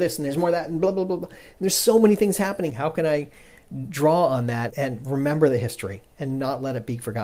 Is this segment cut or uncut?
cut